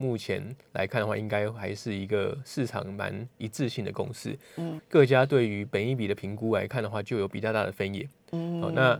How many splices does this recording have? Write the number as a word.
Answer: one